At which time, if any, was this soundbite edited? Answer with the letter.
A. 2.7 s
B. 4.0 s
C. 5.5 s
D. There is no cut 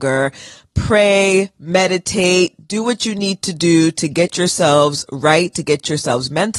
D